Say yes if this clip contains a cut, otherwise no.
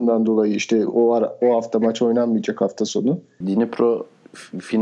yes